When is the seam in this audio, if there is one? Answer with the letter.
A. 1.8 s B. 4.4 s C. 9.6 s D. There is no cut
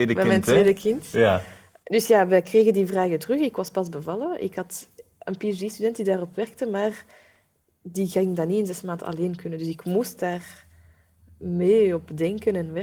A